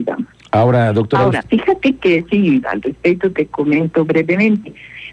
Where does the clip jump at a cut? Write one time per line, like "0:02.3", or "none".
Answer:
0:01.4
0:02.6